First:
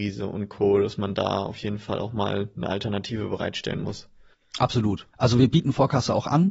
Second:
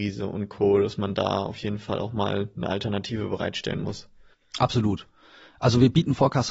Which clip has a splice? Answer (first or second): first